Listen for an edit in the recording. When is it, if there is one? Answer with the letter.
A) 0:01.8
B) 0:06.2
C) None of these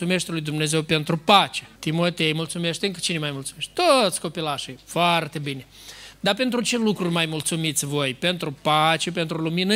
A